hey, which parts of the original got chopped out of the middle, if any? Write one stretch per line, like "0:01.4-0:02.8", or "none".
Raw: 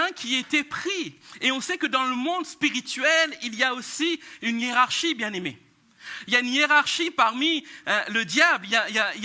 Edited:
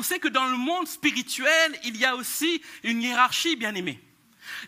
none

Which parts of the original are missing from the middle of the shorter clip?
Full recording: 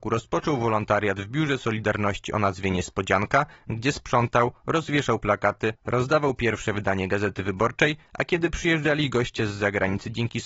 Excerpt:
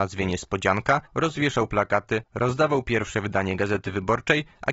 0:03.5-0:04.6

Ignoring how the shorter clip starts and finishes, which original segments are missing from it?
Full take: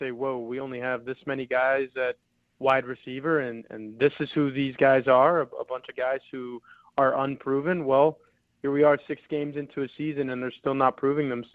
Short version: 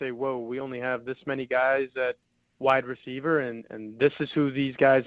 none

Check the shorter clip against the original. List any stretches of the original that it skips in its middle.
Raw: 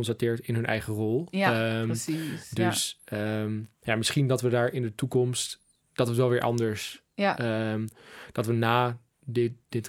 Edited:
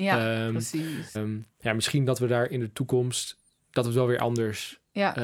0:02.5-0:03.4

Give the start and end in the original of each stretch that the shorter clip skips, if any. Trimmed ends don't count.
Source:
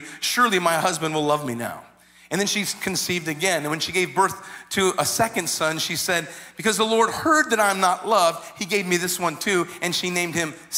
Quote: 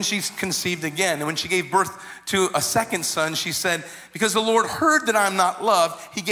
none

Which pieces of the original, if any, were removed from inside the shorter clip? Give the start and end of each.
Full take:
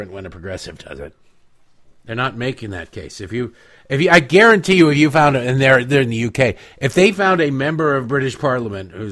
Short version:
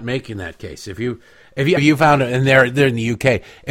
0:04.1-0:04.9

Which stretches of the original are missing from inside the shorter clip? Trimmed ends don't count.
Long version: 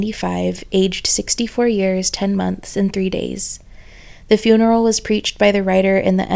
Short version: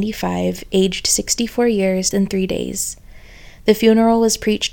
0:02.1-0:02.7

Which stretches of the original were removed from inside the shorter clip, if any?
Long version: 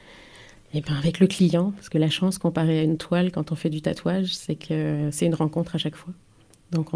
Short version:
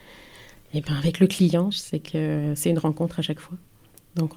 0:01.7-0:04.3

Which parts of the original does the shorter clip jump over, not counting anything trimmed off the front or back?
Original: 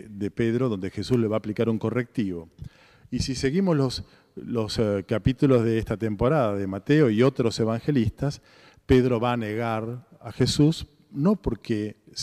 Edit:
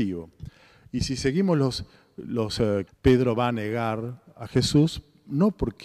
0:05.1-0:08.7

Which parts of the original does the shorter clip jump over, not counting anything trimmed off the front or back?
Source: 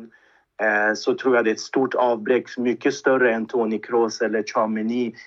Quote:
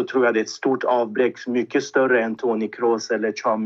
none

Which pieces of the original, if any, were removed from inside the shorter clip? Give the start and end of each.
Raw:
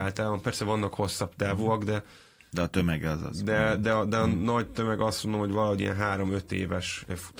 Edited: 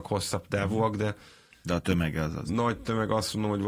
0:03.4-0:04.4

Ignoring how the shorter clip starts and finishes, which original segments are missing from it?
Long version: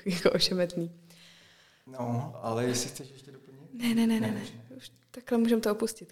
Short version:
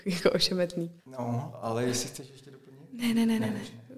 0:01.0-0:01.8

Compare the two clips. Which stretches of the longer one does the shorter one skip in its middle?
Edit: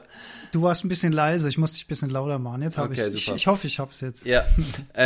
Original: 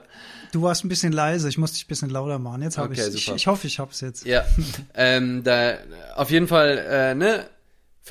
none

